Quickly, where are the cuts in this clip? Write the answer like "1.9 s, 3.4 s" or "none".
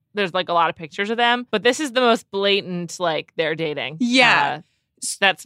1.5 s